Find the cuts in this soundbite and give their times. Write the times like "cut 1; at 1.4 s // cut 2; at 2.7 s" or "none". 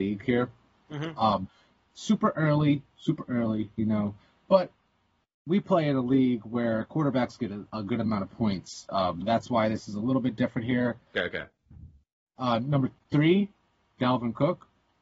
cut 1; at 9.2 s // cut 2; at 11.1 s